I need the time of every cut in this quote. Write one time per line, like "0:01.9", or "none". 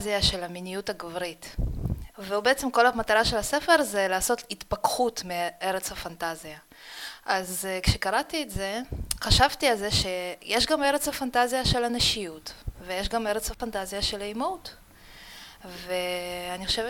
0:02.1